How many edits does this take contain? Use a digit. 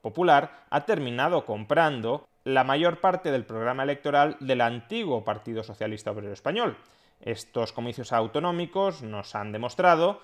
1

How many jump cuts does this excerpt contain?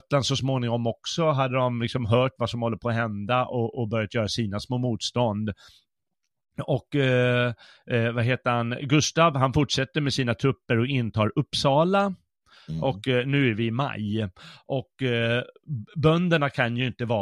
0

